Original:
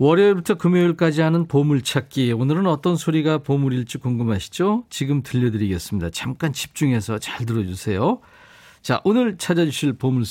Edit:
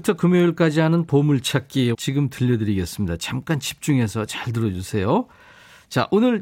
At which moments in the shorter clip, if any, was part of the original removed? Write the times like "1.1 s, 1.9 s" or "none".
1.9 s

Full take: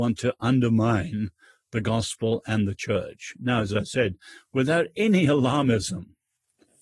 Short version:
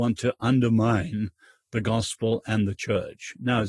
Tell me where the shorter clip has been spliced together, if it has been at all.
none

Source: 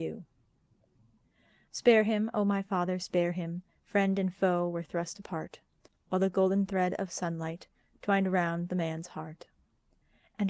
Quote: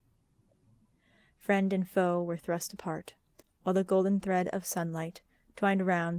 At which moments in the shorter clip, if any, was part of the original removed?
1.3 s

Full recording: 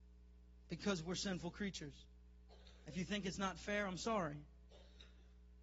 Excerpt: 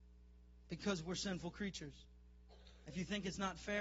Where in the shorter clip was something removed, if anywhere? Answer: none

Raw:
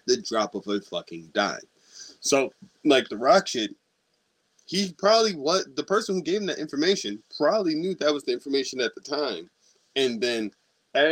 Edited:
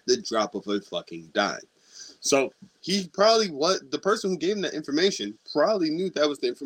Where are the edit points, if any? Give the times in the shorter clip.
2.8 s

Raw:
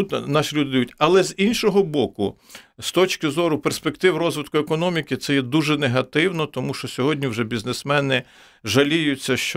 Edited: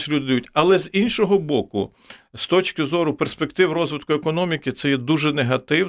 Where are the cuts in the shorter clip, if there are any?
none

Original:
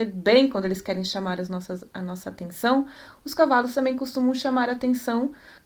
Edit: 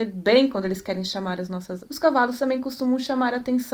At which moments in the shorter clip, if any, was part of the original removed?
1.9 s

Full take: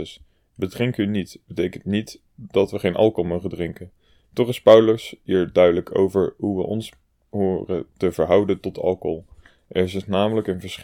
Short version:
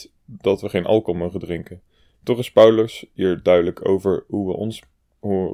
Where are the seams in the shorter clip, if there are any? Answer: none

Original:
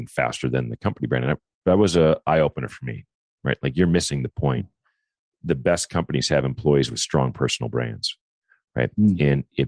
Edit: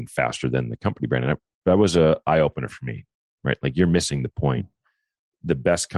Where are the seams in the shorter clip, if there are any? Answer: none

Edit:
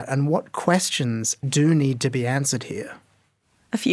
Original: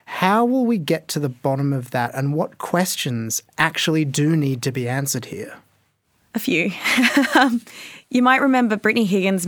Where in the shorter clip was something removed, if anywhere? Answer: 1.4 s

